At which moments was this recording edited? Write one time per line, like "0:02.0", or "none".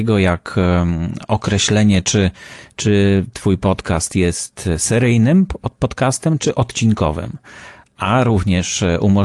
none